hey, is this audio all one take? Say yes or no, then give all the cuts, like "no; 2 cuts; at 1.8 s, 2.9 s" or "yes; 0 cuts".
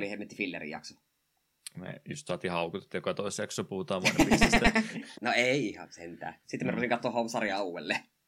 no; 2 cuts; at 5.1 s, 6.4 s